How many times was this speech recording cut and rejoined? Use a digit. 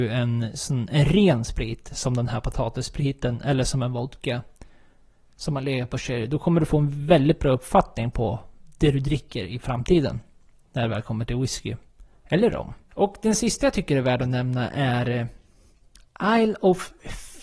0